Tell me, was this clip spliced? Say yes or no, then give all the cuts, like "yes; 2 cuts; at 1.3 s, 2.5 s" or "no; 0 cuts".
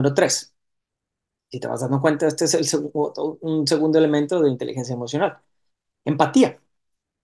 no; 0 cuts